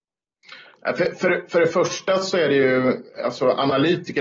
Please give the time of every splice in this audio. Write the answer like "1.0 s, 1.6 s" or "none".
none

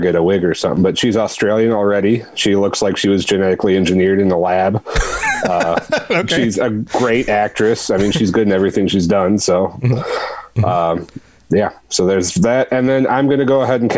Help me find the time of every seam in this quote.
none

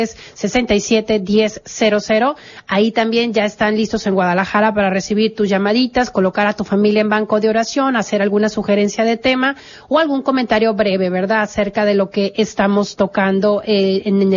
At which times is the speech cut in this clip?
none

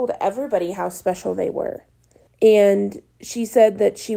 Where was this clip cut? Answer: 2.3 s

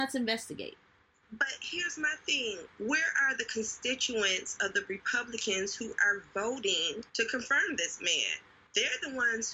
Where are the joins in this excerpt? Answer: 7.1 s

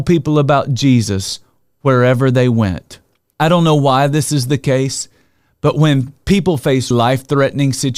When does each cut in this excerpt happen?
3.3 s, 6.9 s

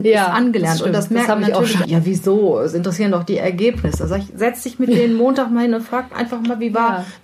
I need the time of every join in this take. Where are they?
1.8 s

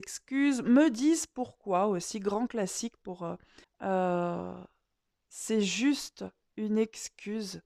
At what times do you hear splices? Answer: 3.6 s

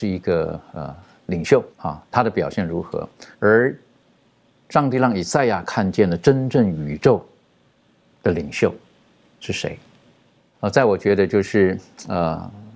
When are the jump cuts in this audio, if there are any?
1.7 s, 3.3 s, 10.5 s

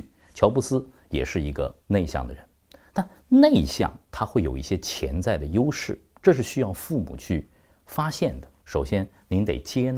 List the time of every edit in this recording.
8.6 s

